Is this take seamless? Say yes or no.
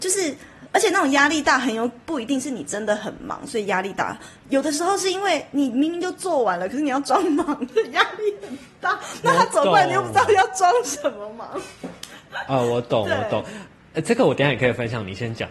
yes